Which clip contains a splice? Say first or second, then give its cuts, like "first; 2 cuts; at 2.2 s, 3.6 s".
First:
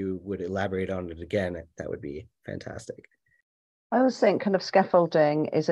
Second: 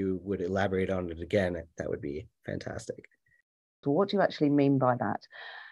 second; 1 cut; at 3.8 s